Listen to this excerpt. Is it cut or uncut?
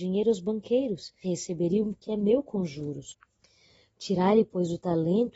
cut